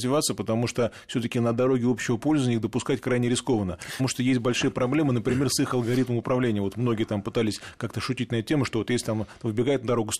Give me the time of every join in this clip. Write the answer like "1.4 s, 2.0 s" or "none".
4.0 s